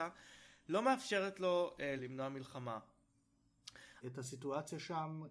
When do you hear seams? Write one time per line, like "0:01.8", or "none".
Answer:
0:02.0
0:04.0